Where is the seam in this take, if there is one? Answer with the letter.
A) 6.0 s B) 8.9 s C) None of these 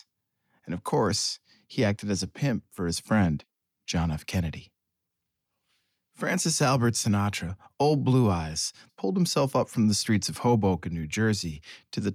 B